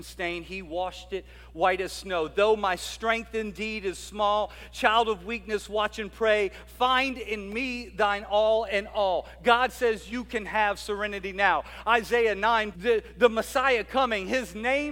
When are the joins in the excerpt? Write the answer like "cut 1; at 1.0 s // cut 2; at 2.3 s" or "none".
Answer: cut 1; at 12.7 s